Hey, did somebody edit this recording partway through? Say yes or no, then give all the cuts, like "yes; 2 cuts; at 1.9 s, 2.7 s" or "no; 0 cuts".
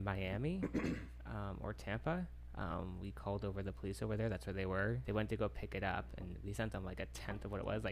yes; 1 cut; at 5.0 s